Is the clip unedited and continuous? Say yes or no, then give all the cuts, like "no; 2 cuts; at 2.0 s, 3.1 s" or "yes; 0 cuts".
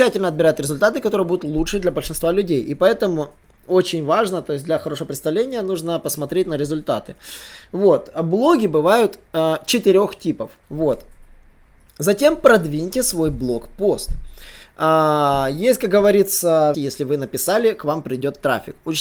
no; 2 cuts; at 10.6 s, 16.7 s